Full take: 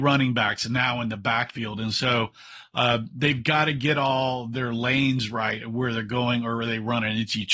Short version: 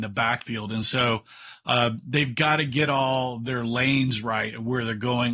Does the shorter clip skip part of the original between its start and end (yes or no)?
no